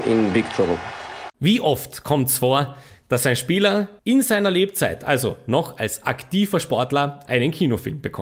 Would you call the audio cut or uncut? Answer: cut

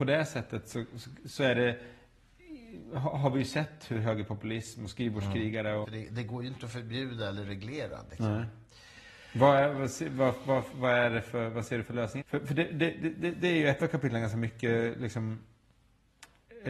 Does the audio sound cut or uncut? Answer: cut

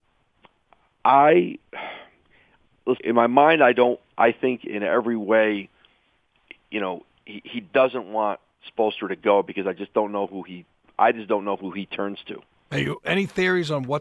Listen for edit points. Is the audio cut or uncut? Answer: cut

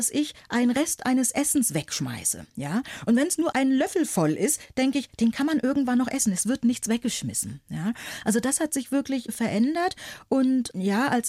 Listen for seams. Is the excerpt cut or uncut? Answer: uncut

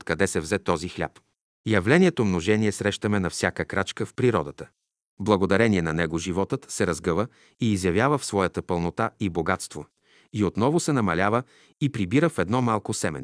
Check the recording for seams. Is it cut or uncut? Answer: uncut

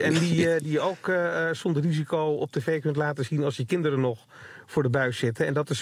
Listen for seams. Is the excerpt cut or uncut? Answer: uncut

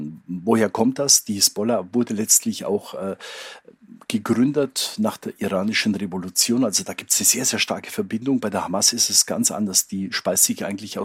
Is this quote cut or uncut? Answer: uncut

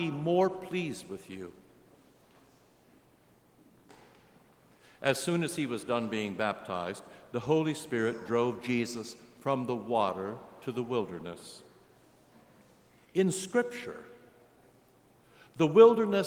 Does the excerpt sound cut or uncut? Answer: uncut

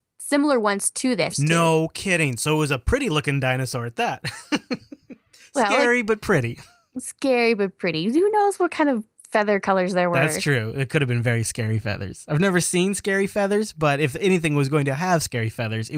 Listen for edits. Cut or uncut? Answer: cut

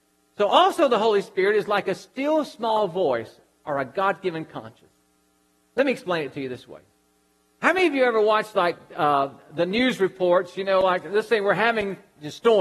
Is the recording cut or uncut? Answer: uncut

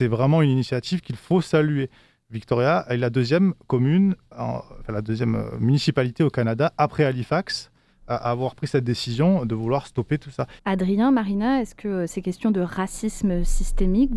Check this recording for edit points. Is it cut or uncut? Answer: cut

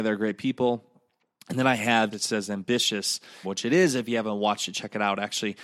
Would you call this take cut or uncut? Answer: cut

